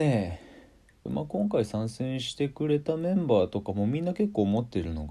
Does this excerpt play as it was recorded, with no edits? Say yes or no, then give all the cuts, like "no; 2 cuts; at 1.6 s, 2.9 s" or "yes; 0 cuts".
no; 1 cut; at 1.1 s